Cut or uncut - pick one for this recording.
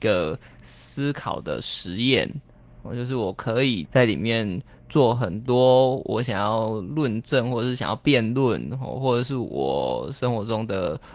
cut